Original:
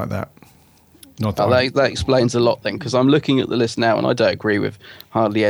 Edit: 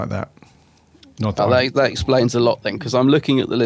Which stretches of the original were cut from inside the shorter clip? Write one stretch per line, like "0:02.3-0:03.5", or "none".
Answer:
none